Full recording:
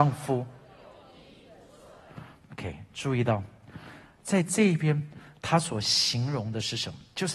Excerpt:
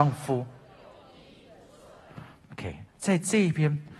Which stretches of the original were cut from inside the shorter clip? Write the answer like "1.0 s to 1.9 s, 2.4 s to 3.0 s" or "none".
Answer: 2.9 s to 4.1 s

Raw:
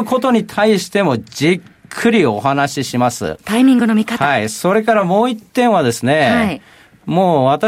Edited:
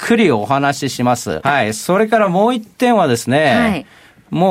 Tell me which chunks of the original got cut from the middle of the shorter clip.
3.4 s to 4.2 s

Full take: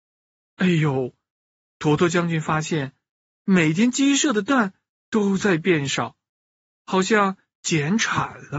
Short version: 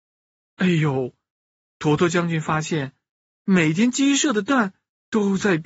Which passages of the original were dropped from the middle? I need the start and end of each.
none

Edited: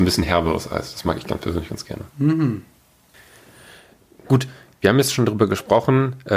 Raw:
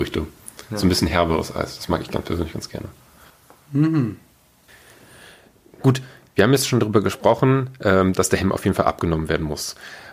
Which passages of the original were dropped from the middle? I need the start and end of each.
2.9 s to 3.6 s

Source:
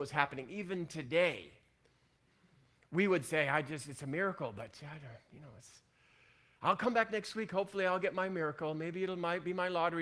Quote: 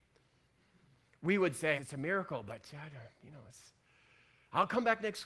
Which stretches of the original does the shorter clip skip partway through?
3.4 s to 3.8 s

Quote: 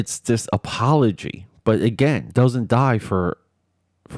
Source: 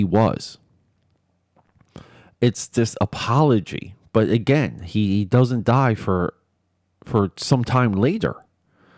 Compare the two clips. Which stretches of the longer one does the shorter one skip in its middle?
4.8 s to 5.3 s

